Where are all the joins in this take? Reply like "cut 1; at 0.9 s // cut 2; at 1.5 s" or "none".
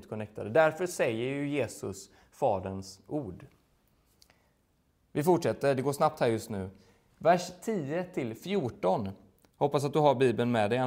none